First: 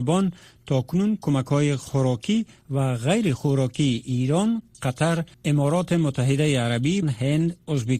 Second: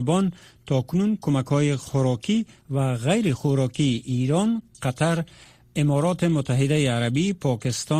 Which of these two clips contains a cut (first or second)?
first